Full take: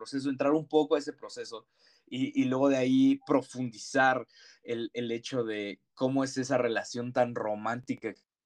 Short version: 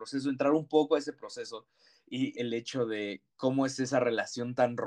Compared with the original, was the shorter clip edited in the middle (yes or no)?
yes